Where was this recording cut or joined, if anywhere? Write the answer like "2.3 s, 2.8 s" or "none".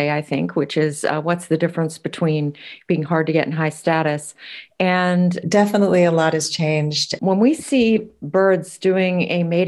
5.4 s, 7.2 s